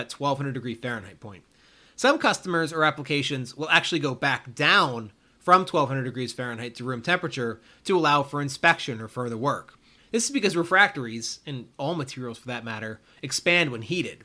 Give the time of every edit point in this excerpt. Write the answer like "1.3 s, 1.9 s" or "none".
10.0 s, 11.7 s